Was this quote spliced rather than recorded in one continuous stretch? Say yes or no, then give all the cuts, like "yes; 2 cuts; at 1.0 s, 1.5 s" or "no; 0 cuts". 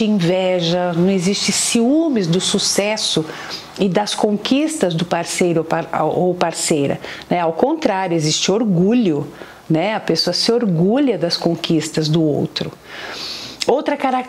no; 0 cuts